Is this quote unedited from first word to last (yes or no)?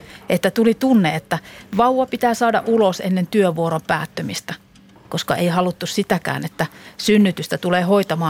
yes